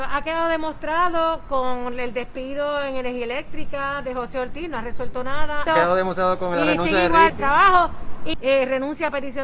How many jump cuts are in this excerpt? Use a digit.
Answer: 3